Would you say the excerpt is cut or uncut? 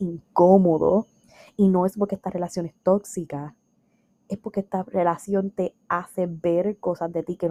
uncut